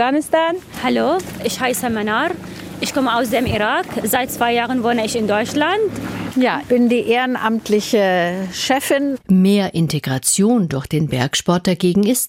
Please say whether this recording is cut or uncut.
cut